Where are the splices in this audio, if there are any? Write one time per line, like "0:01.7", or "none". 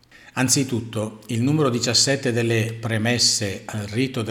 none